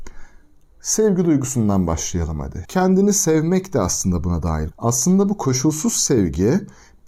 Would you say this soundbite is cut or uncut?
cut